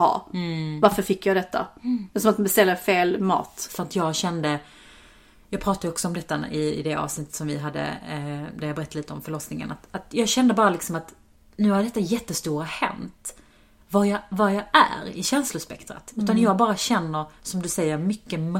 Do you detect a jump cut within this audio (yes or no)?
yes